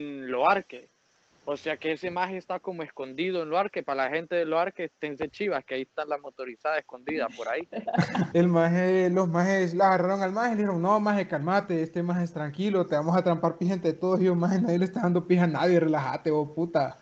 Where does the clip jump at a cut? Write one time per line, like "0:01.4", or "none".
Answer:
0:08.3